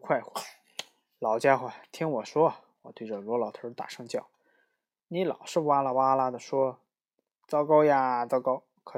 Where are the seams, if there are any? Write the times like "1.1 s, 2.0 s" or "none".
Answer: none